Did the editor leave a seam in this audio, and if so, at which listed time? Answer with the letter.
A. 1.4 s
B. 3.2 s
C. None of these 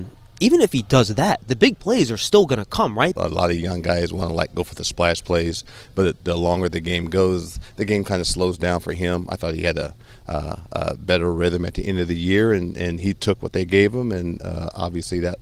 B